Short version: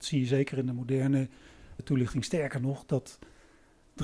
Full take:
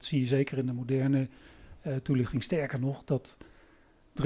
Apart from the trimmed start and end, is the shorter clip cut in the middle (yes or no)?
yes